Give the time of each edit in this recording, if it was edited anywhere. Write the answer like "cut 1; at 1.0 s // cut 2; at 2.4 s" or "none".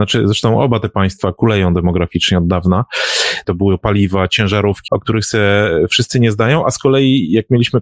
cut 1; at 3.4 s // cut 2; at 4.9 s